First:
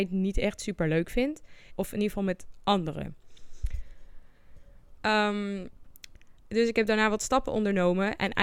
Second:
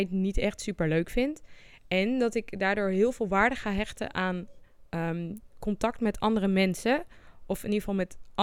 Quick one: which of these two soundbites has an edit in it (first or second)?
first